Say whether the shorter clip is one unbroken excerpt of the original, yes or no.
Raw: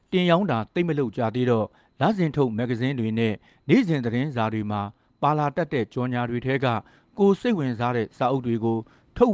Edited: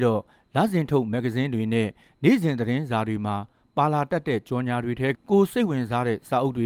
no